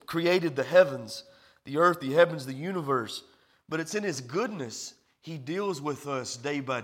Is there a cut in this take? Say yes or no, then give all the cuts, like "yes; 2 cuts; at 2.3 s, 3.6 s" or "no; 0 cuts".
no; 0 cuts